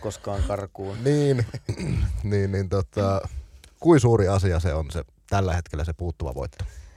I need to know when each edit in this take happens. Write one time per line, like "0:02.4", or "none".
none